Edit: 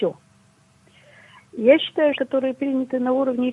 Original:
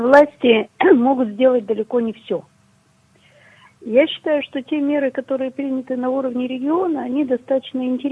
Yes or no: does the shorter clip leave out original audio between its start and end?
yes